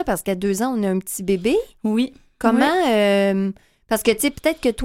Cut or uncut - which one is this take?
uncut